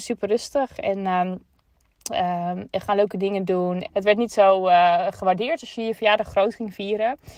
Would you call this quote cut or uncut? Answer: cut